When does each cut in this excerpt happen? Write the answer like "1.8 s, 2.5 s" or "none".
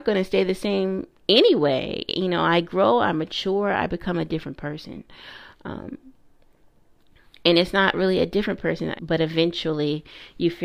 8.9 s